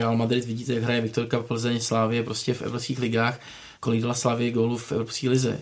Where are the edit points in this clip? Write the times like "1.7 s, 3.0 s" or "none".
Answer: 2.6 s, 3.7 s